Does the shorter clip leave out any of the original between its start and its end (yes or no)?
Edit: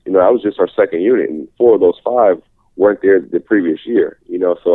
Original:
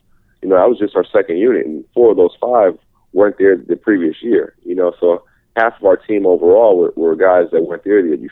no